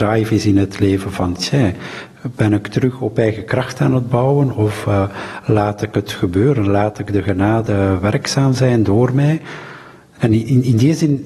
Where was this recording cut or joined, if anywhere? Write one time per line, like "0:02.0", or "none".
none